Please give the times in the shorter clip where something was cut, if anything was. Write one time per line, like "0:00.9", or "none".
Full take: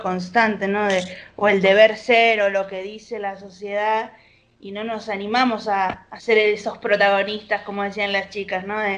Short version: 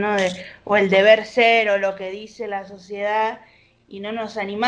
none